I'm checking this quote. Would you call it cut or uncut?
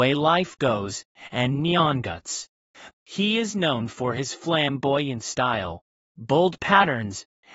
cut